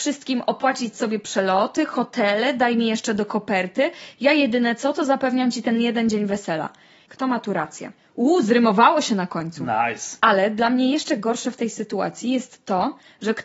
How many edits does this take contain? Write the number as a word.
two